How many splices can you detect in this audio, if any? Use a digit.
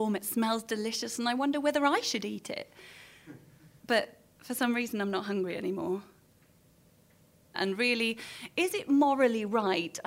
1